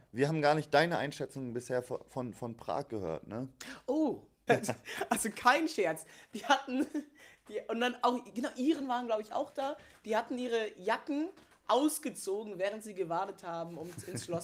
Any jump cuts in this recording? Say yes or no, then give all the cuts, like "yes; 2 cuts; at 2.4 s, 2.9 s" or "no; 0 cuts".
yes; 1 cut; at 4.5 s